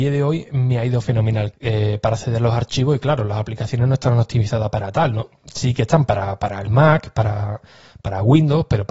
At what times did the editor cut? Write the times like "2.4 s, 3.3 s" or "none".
1.5 s